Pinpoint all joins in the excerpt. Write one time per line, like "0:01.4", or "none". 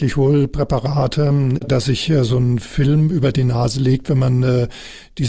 0:01.7